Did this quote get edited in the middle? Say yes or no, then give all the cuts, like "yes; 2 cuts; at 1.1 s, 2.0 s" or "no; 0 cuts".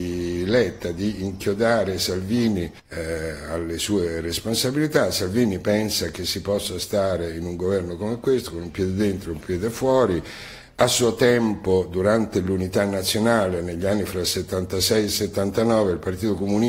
yes; 1 cut; at 2.8 s